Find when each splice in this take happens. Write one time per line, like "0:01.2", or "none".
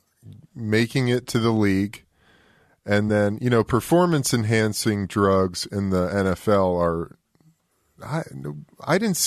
none